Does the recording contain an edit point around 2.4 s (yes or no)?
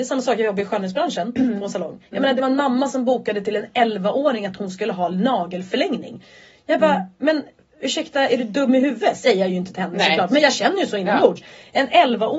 no